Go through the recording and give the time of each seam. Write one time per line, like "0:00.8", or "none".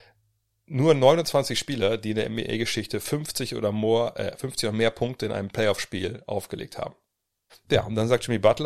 0:07.5